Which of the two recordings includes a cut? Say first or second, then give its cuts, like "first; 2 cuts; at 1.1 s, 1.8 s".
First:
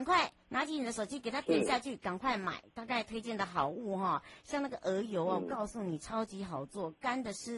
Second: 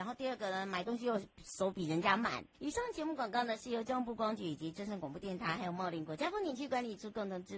second; 1 cut; at 2.5 s